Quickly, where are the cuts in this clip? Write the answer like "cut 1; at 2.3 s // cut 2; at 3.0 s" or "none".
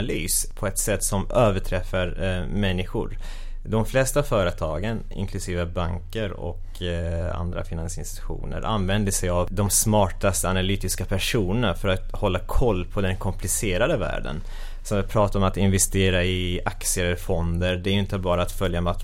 none